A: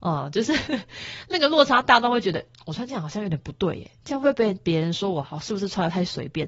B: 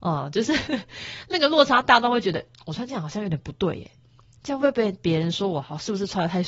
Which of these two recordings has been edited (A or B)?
A